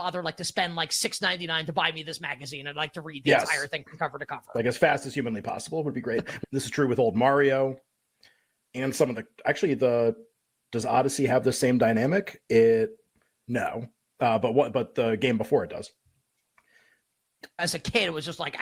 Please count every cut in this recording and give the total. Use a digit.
2